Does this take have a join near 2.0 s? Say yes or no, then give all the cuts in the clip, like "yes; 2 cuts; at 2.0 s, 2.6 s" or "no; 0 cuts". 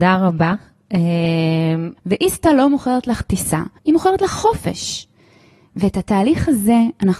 yes; 2 cuts; at 2.0 s, 3.8 s